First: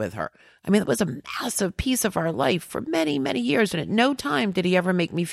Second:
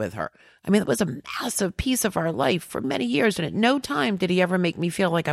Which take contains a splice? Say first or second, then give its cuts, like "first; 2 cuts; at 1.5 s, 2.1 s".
second; 1 cut; at 2.8 s